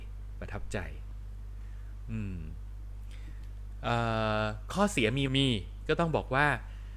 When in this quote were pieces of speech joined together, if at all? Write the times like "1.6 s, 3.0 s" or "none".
5.3 s

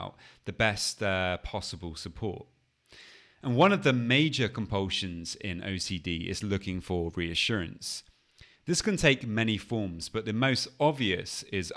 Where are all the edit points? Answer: 3.4 s

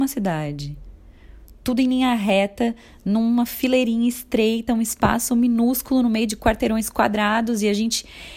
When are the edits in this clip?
none

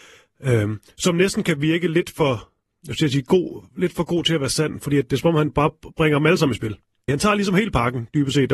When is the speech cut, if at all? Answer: 7.1 s

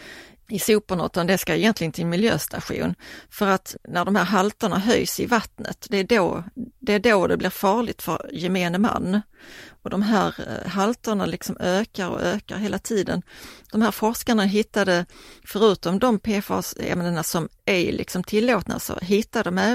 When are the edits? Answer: none

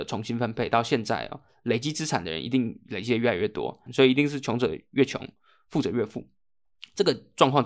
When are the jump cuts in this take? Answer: 3.9 s

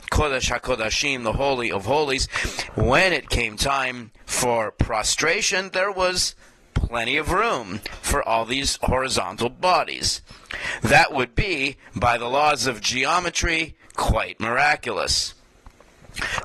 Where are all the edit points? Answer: 2.7 s

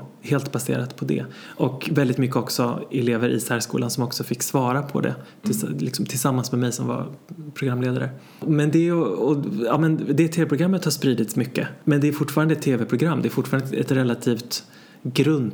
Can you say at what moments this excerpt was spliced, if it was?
none

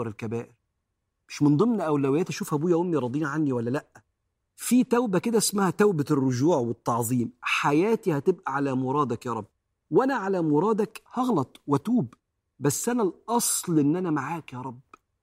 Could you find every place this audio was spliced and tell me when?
none

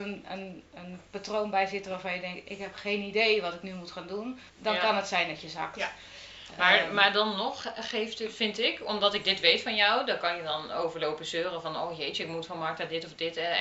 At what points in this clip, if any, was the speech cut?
4.5 s

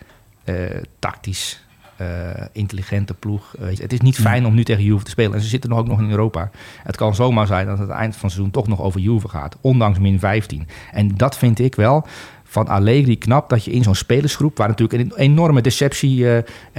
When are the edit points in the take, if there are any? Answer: 3.8 s

